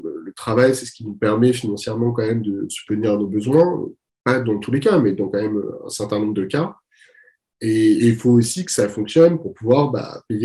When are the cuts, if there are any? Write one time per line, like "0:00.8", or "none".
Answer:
none